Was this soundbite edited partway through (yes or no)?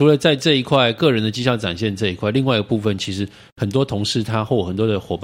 no